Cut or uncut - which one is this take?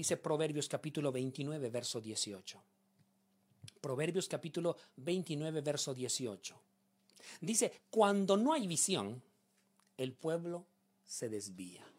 uncut